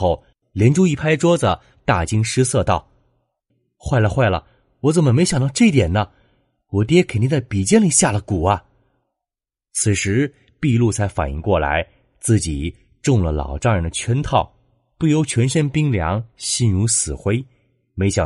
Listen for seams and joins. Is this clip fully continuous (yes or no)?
yes